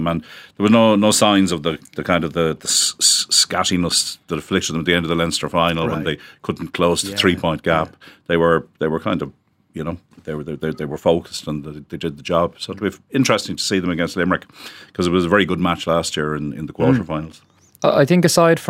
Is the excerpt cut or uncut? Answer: uncut